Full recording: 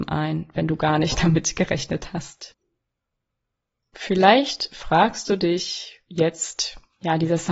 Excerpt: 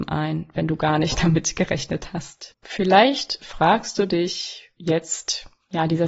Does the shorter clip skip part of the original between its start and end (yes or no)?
yes